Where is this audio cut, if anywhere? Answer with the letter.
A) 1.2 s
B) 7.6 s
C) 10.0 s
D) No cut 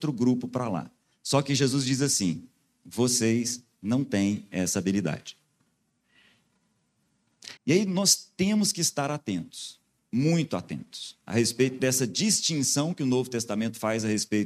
B